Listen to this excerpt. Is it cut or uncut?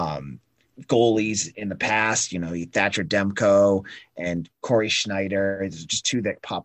uncut